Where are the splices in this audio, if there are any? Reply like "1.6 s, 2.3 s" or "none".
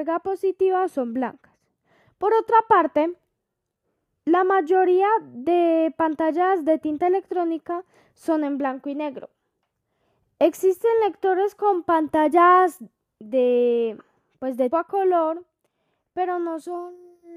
2.0 s, 14.7 s